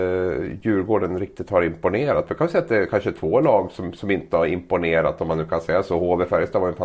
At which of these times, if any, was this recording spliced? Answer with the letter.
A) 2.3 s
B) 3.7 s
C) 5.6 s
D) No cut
D